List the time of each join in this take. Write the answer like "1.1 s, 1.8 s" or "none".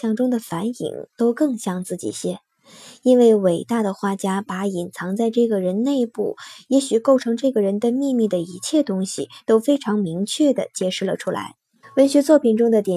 11.8 s